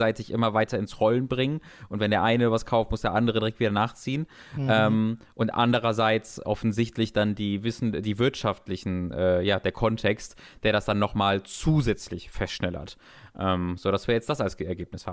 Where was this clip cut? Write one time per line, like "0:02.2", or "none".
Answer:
none